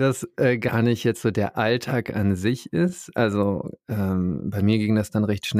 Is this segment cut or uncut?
uncut